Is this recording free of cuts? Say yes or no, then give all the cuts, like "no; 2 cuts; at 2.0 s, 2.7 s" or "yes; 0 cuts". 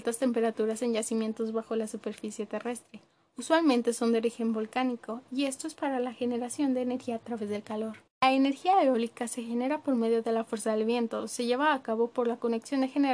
no; 1 cut; at 8.1 s